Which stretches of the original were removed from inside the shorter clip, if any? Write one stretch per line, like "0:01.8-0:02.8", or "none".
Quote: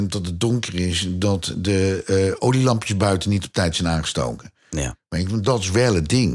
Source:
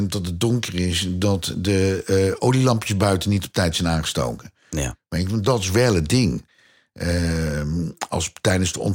none